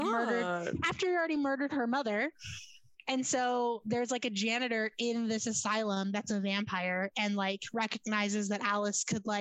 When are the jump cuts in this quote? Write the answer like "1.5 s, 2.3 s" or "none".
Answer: none